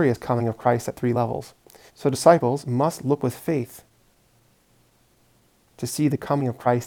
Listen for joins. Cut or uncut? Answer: cut